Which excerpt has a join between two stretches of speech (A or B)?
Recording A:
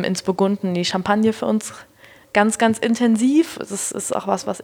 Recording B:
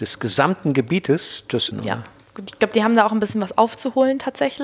B